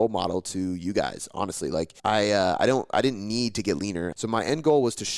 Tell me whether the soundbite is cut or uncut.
cut